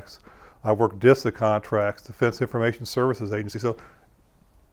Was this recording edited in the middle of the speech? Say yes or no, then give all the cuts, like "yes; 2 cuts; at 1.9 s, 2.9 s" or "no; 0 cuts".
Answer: no; 0 cuts